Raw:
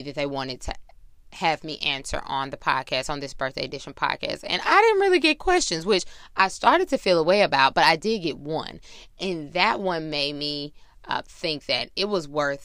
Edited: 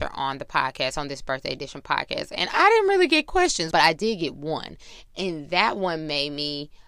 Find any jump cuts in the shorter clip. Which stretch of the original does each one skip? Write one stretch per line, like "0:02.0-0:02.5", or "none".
0:05.8-0:07.7